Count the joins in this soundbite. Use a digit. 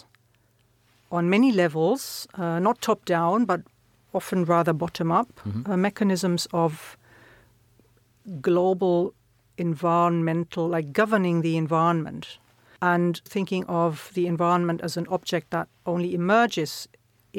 1